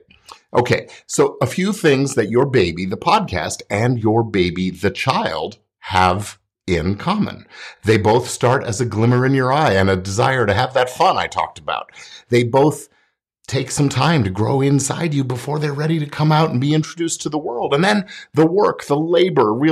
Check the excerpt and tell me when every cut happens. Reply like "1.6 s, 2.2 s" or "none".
none